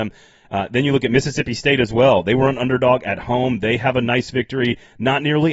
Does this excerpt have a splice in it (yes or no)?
no